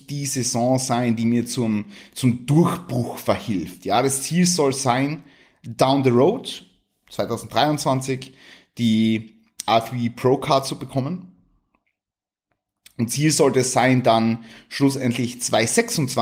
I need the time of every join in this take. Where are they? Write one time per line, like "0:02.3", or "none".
none